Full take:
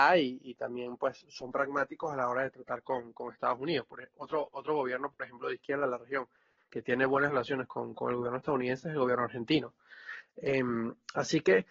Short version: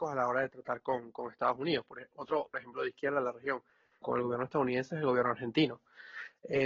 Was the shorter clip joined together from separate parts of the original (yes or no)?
yes